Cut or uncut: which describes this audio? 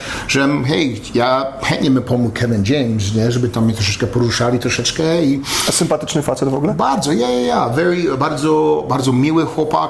uncut